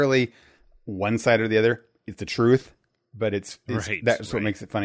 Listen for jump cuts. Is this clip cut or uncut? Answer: uncut